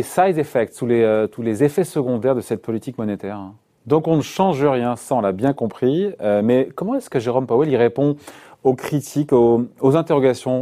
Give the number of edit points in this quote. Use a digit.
1